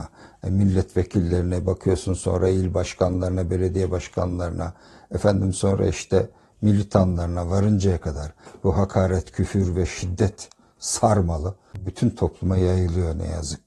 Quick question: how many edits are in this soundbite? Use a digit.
0